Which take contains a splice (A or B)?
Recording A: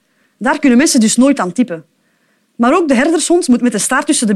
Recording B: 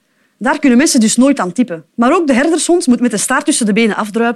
B